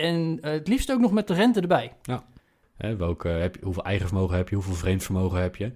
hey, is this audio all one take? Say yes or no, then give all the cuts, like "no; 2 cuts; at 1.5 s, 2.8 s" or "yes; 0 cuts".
no; 1 cut; at 2.6 s